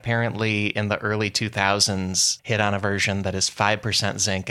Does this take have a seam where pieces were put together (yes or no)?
yes